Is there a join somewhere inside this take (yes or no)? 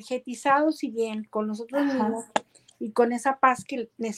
no